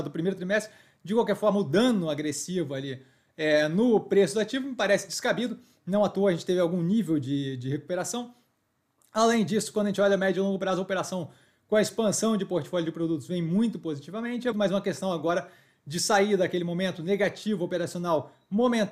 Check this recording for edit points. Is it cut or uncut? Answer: cut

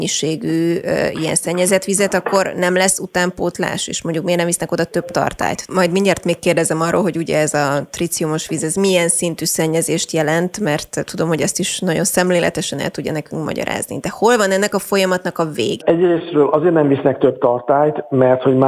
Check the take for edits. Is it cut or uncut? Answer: cut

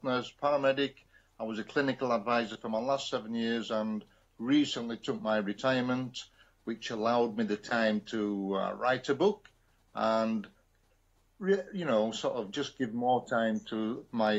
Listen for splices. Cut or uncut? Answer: uncut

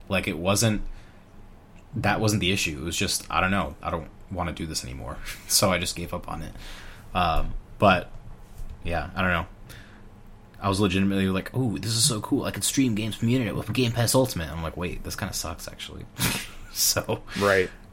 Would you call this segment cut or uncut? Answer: cut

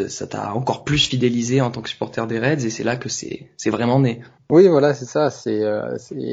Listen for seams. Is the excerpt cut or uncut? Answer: uncut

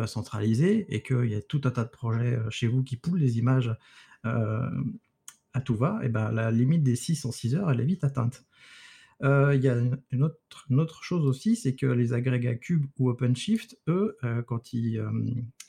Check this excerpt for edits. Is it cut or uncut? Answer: uncut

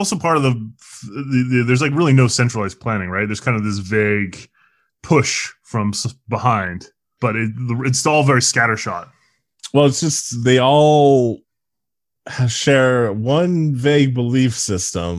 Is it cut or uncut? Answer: uncut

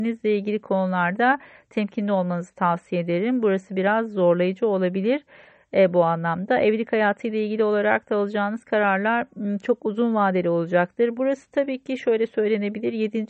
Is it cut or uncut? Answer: cut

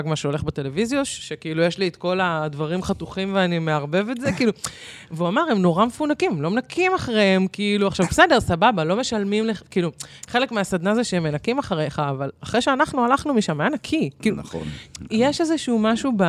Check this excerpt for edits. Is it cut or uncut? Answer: uncut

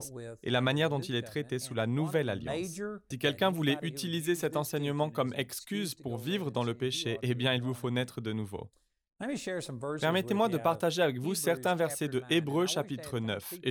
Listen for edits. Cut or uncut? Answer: cut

